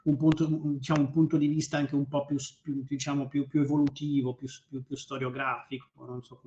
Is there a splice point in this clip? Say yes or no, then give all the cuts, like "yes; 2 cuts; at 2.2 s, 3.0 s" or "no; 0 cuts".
no; 0 cuts